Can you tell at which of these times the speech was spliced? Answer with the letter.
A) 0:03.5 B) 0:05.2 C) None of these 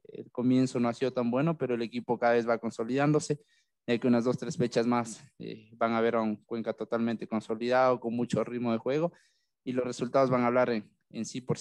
C